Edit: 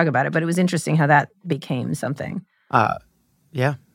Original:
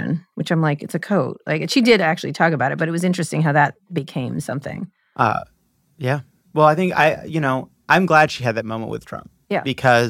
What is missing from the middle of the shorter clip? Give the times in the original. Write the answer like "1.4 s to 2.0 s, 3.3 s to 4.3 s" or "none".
none